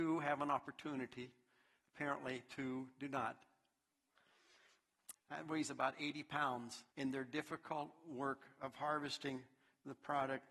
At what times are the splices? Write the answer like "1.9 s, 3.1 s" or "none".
5.1 s, 6.9 s